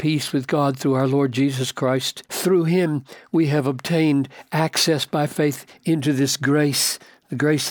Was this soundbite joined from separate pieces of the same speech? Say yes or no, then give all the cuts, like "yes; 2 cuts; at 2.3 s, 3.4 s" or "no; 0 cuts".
yes; 1 cut; at 2.2 s